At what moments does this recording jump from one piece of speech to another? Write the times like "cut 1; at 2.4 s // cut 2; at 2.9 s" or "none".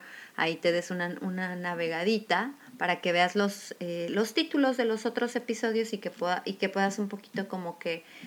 none